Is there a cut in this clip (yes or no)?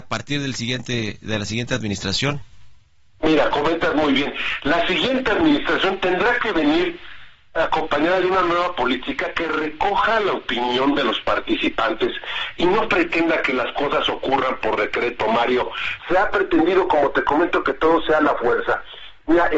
yes